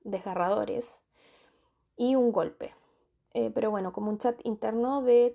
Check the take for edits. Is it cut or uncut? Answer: cut